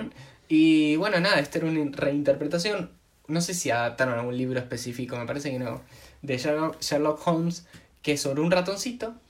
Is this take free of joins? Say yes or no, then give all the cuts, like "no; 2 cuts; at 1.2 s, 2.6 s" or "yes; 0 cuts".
yes; 0 cuts